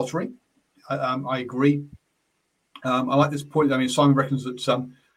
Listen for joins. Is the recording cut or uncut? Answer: uncut